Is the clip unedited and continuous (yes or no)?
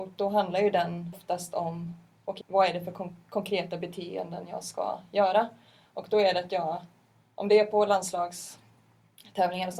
no